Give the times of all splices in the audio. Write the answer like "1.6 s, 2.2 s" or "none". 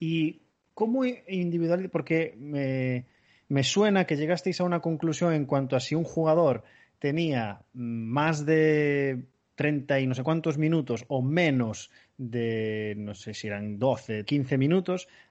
14.3 s